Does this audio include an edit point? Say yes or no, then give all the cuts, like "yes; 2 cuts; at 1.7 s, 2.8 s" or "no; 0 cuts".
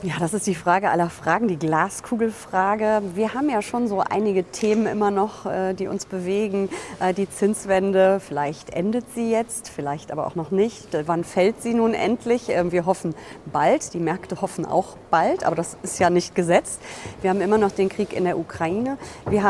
yes; 1 cut; at 11.1 s